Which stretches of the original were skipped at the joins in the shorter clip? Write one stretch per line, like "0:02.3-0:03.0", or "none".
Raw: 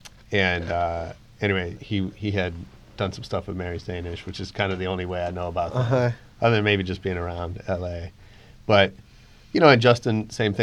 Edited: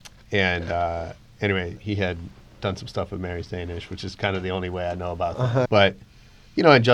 0:01.8-0:02.1
0:06.0-0:08.6